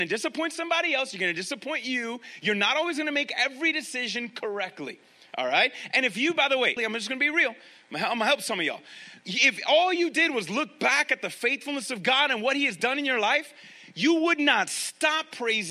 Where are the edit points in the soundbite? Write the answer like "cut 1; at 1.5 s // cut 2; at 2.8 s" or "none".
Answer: cut 1; at 6.8 s // cut 2; at 9.2 s